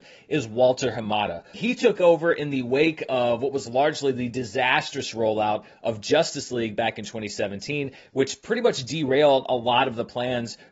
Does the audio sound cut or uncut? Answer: cut